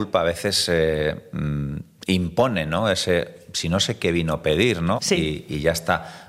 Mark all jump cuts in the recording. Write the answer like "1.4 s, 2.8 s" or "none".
5.0 s